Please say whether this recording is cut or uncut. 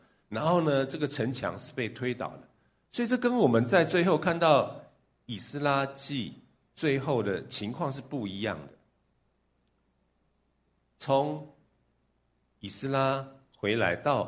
uncut